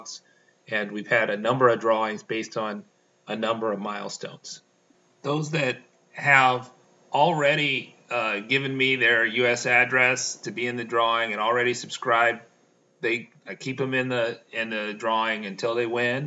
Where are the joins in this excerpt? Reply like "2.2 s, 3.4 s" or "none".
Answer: none